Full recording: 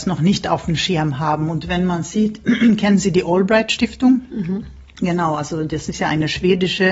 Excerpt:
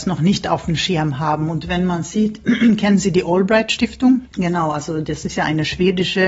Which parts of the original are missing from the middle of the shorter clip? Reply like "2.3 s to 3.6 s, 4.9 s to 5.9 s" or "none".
4.3 s to 4.9 s

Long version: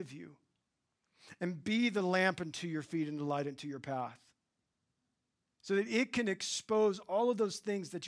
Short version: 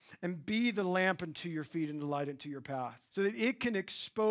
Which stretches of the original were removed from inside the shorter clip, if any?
4.3 s to 5.6 s

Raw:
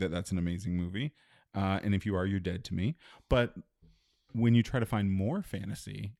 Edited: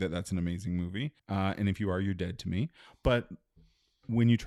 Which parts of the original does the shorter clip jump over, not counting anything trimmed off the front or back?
1.2 s to 1.4 s

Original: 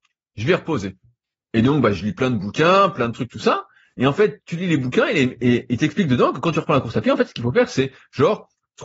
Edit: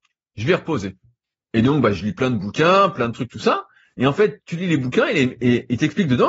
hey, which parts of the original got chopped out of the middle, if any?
none

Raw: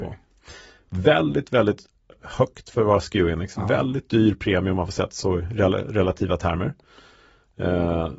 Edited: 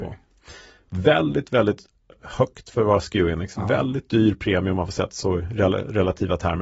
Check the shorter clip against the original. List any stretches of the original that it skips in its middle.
none

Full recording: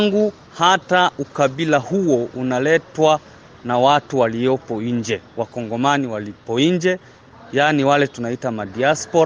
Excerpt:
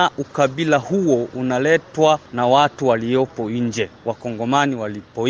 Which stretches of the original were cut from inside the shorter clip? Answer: 3.3 s to 3.6 s

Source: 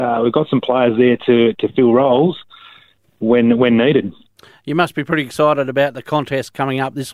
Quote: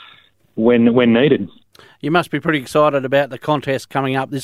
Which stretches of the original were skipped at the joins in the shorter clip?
none

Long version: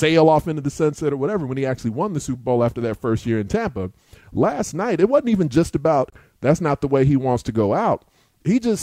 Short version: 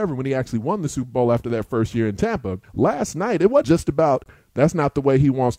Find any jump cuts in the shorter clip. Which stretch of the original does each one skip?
3.9 s to 4.2 s, 5.2 s to 5.5 s

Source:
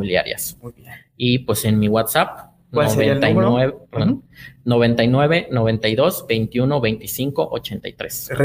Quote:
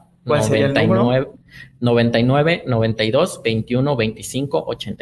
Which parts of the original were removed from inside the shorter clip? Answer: 3.8 s to 4.2 s

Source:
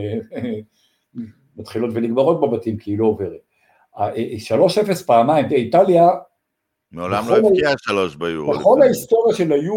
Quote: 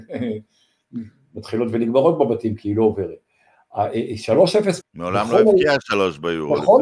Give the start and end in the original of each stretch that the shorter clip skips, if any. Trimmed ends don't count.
5.0 s to 6.8 s

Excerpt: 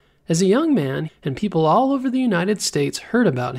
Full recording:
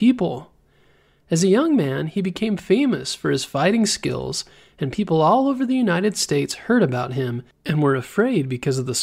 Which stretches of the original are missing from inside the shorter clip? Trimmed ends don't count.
2.1 s to 4.6 s

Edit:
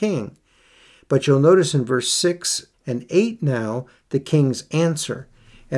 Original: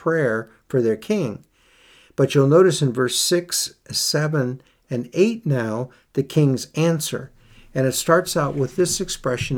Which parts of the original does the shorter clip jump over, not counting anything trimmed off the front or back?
3.8 s to 4.8 s

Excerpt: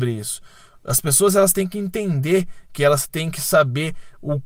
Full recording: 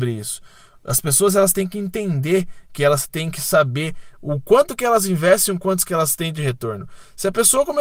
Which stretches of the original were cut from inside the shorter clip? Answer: none

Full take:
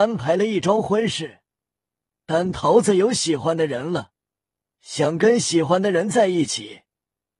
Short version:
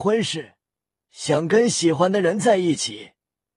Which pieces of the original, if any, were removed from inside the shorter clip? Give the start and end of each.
1.8 s to 4.7 s

